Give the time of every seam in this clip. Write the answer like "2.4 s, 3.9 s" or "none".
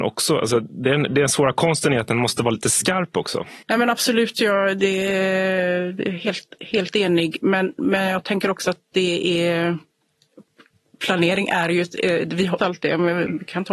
3.6 s, 12.6 s